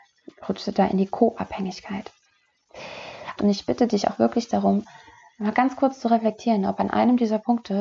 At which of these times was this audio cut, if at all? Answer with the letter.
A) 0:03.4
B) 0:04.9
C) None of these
A